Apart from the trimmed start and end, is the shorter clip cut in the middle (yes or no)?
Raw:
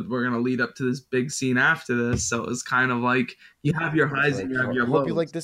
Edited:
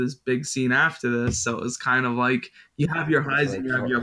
no